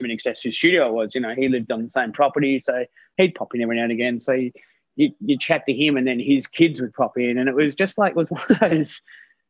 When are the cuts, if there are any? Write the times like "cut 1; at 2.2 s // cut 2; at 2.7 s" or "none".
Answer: none